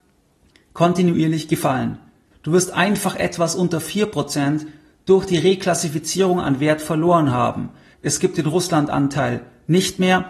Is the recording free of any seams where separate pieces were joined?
no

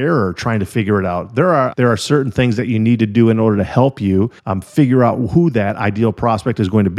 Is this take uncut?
no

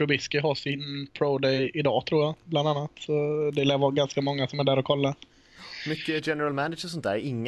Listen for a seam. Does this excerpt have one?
no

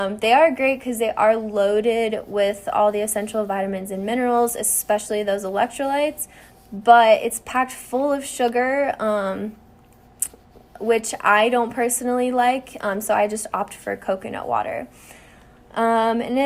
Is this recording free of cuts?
yes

